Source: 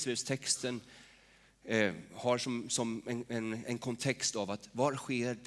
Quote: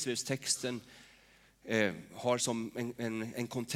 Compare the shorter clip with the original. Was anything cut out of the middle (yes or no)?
yes